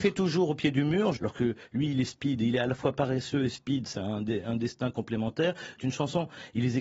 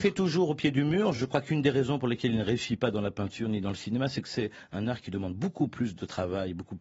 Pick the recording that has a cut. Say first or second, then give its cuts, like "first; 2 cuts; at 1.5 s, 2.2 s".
first; 2 cuts; at 1.2 s, 5.8 s